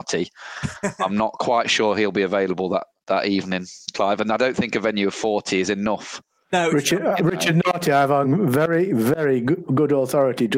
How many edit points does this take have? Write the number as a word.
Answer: zero